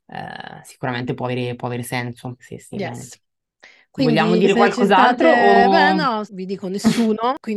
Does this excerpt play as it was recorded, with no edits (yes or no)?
no